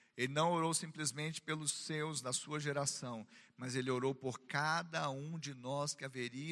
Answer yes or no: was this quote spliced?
no